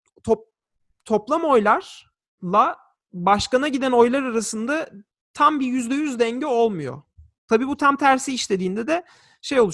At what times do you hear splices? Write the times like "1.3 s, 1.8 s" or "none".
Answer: 7.4 s